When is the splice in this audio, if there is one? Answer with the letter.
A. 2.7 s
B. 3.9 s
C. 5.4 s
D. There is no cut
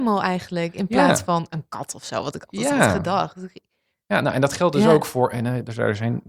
D